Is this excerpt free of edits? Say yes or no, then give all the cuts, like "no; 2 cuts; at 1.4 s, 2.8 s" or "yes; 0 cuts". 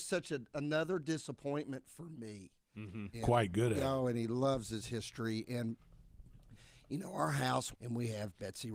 no; 2 cuts; at 3.1 s, 7.7 s